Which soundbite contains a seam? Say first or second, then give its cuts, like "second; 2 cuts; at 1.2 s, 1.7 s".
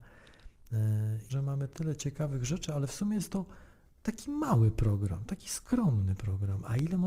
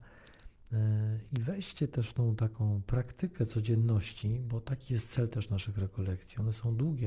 first; 1 cut; at 1.3 s